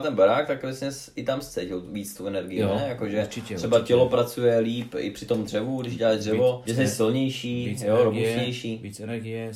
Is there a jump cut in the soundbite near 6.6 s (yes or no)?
yes